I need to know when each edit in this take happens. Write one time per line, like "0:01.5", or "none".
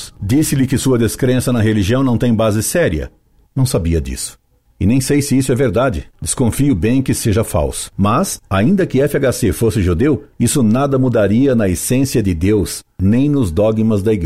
0:03.5